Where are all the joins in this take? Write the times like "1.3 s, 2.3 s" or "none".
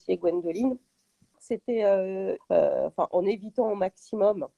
1.3 s, 2.4 s